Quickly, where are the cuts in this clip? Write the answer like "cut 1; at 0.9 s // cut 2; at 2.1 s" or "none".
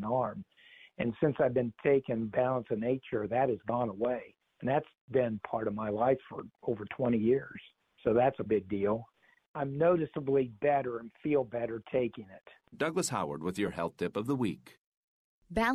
cut 1; at 8.5 s // cut 2; at 12.7 s